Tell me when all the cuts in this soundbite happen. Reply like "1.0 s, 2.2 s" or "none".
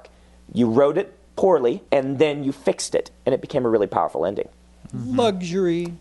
1.9 s